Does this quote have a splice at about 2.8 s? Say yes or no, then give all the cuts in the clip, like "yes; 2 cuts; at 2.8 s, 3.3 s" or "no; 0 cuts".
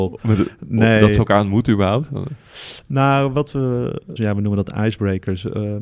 no; 1 cut; at 4.2 s